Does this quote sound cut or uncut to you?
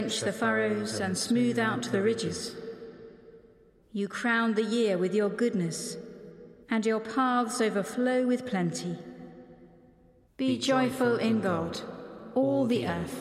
cut